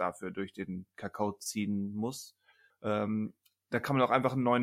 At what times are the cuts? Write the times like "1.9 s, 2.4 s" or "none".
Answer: 2.7 s